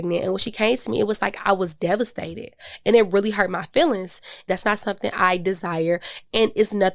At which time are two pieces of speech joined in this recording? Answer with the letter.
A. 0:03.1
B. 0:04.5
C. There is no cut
B